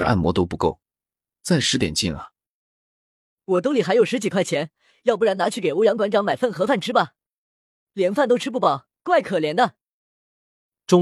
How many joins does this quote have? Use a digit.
0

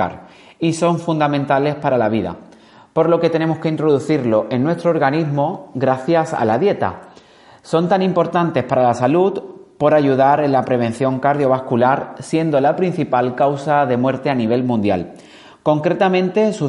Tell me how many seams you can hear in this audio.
0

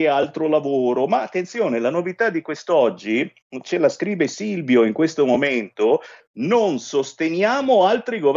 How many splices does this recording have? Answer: 1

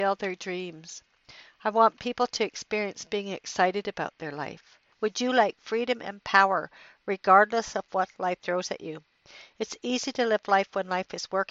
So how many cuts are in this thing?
1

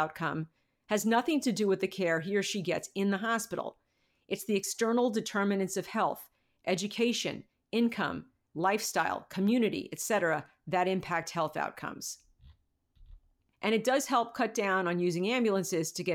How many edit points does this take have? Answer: 2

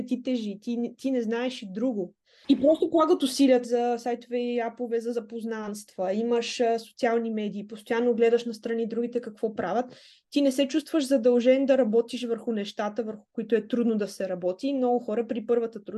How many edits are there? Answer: 2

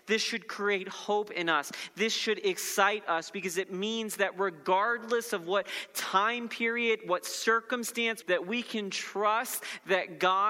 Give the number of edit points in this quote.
1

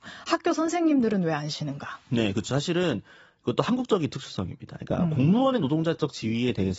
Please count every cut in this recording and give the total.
0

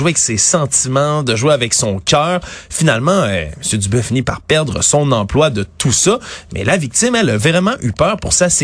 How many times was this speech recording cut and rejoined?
0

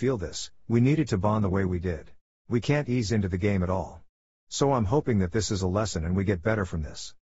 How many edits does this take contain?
1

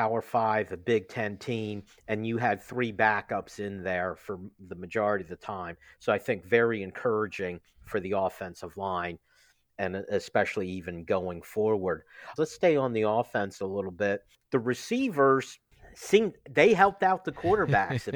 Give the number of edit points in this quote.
1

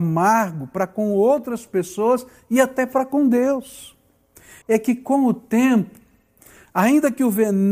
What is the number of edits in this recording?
1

